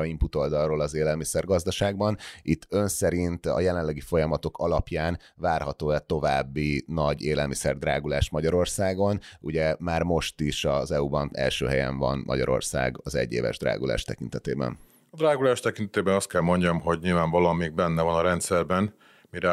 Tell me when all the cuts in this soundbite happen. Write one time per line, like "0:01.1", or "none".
none